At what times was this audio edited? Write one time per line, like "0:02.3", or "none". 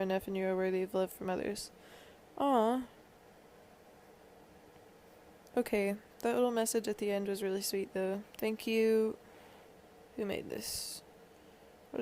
none